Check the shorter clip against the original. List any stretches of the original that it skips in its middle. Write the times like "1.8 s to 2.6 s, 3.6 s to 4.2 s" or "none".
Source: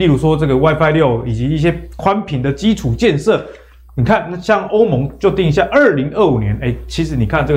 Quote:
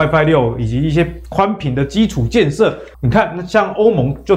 3.6 s to 3.9 s